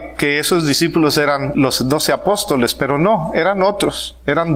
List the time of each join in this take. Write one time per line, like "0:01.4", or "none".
0:01.5